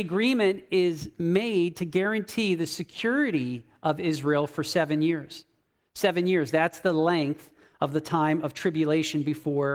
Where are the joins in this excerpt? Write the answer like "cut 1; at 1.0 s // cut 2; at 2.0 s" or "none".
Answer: none